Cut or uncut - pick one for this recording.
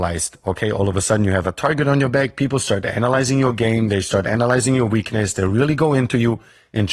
uncut